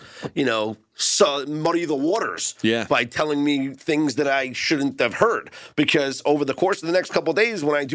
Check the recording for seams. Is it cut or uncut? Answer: uncut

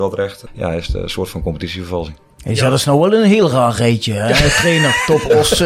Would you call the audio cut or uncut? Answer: uncut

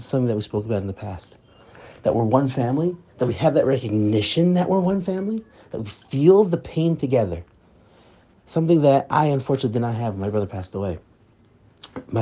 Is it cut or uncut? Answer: uncut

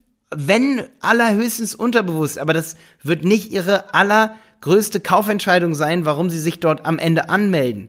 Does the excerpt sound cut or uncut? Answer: uncut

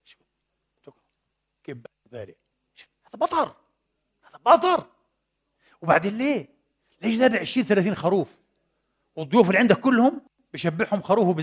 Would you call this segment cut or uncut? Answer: uncut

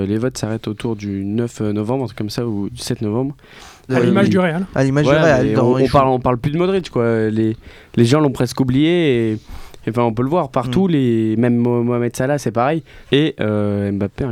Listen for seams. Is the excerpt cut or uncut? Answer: cut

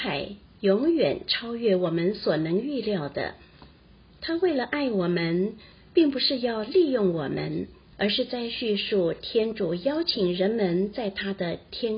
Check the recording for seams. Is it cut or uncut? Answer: cut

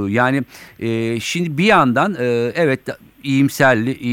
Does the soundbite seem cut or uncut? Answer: uncut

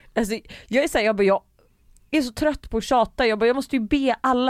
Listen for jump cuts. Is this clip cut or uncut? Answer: uncut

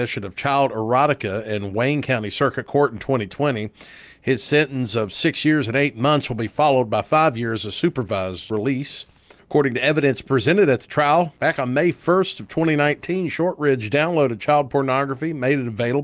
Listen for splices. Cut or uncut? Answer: cut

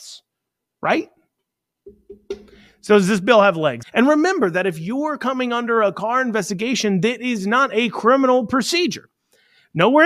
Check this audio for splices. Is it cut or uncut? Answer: cut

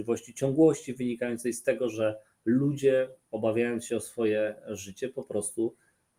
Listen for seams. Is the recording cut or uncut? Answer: uncut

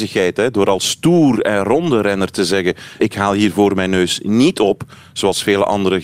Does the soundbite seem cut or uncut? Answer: cut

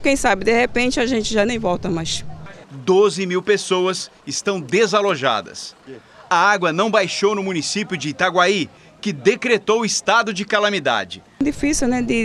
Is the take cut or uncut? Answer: cut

